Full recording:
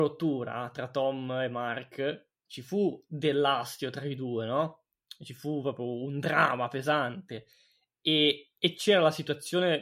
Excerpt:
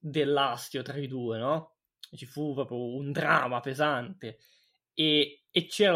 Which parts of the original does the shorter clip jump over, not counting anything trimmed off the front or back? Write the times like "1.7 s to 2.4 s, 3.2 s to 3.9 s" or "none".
none